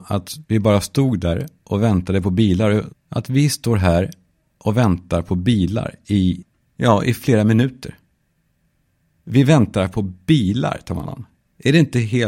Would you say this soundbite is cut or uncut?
cut